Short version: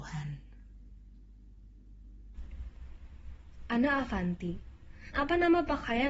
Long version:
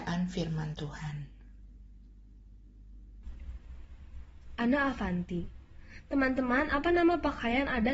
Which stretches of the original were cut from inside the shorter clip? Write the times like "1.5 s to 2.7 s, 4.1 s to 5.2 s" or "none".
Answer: 6.0 s to 6.7 s